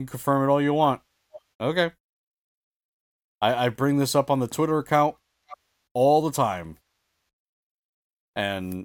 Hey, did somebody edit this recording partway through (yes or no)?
yes